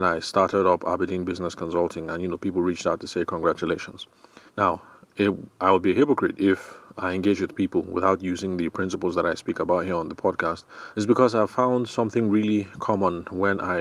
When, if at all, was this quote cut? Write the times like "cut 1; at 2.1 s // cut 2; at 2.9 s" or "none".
cut 1; at 4.5 s // cut 2; at 10.9 s